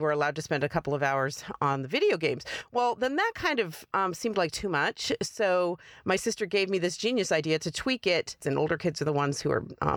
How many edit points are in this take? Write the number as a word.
one